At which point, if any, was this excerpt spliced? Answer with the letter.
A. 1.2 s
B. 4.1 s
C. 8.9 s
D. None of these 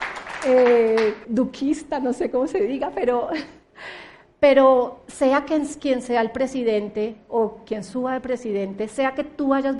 A